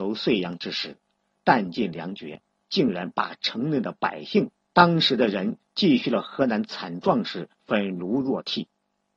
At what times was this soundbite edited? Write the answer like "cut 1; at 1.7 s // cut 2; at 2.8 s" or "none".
cut 1; at 2.6 s // cut 2; at 4.7 s // cut 3; at 7.5 s